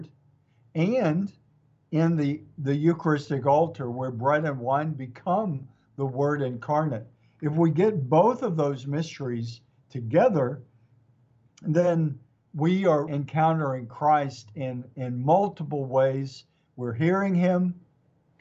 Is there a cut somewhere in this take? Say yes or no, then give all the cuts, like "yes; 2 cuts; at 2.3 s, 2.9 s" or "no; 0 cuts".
yes; 1 cut; at 13.1 s